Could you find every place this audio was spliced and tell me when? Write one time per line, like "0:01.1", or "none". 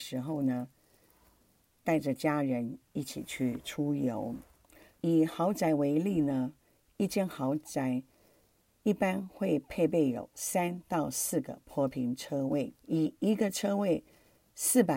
0:05.0
0:12.8